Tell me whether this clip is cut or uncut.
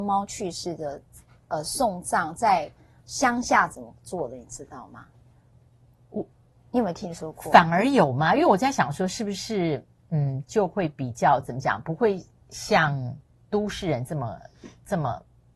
uncut